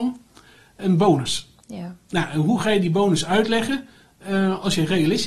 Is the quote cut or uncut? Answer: uncut